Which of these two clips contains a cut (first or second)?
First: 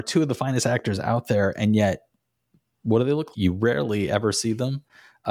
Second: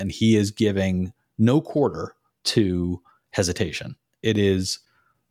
first